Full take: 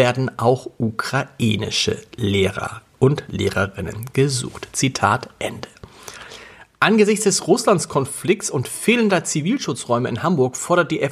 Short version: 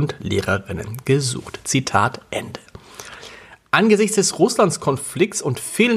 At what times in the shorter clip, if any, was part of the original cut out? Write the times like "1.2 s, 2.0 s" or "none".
none